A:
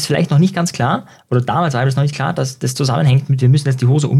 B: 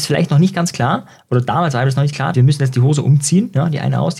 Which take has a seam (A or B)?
B